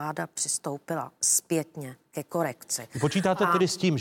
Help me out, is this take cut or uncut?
uncut